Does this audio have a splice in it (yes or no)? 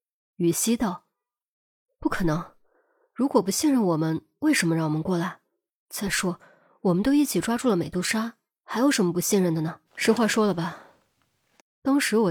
yes